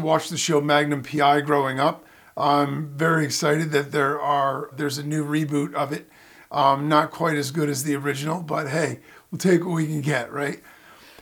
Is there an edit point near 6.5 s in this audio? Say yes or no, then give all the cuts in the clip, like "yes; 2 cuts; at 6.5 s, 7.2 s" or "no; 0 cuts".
no; 1 cut; at 4.7 s